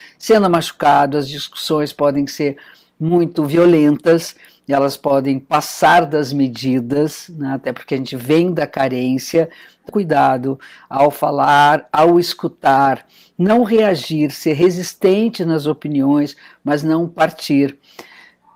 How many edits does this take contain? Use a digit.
1